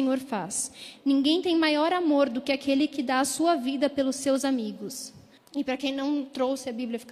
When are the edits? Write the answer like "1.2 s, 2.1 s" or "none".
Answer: 1.0 s, 5.4 s